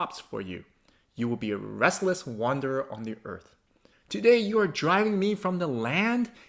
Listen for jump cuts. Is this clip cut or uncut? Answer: cut